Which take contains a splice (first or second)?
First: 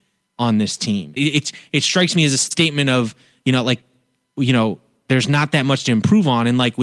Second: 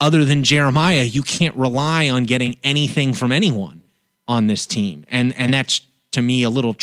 first